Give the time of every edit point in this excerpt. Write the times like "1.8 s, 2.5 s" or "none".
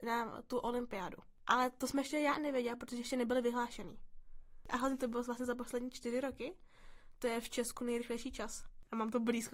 none